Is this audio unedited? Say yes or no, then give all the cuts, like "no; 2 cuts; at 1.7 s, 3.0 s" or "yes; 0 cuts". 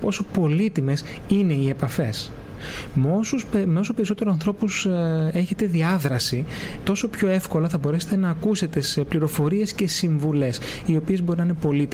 no; 1 cut; at 6.8 s